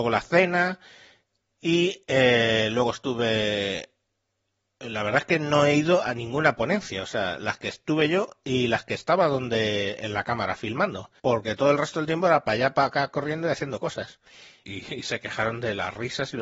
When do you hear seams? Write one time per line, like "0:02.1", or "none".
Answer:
0:11.2
0:14.6